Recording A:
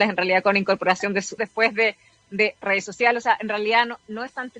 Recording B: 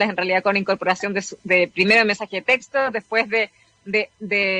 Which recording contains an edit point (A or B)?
A